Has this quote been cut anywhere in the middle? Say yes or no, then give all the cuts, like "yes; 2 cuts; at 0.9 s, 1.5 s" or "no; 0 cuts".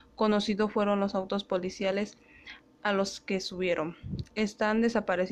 no; 0 cuts